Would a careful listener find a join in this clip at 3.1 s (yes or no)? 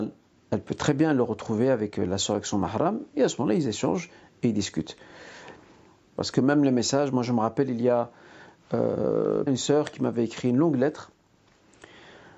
no